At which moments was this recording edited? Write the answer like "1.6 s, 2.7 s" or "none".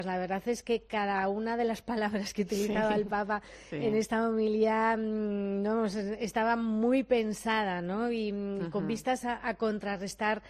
none